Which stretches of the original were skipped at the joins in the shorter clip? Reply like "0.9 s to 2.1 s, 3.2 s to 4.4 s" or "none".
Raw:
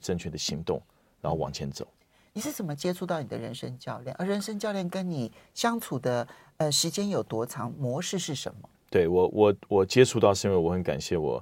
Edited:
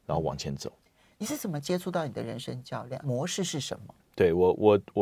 4.2 s to 7.8 s